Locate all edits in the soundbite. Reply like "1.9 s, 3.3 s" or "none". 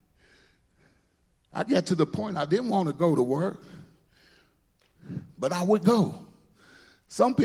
1.4 s